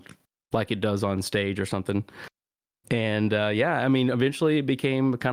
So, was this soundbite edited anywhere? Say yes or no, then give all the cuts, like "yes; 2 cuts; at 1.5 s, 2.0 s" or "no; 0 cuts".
no; 0 cuts